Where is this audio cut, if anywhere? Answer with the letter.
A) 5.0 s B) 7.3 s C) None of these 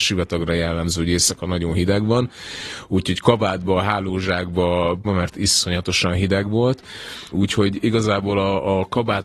A